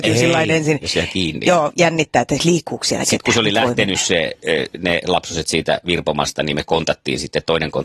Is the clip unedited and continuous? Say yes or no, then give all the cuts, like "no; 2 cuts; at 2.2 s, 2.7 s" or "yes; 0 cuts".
yes; 0 cuts